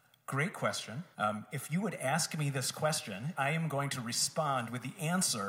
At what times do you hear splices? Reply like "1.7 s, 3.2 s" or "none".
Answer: 1.1 s, 3.3 s